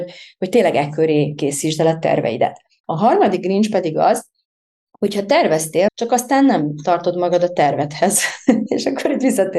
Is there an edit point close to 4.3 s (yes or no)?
no